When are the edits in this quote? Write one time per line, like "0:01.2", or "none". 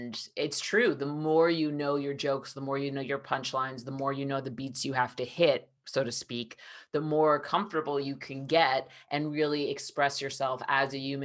none